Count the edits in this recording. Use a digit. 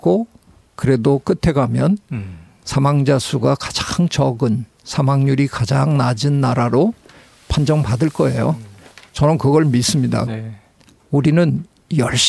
1